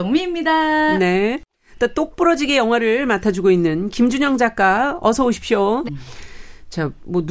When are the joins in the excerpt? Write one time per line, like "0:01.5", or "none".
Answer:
0:05.9